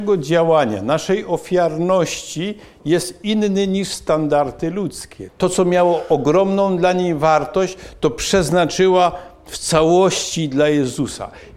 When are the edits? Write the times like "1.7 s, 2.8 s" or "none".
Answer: 5.3 s